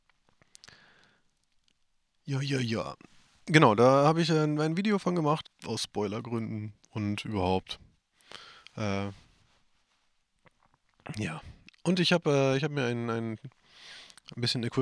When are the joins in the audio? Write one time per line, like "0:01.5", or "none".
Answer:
0:05.4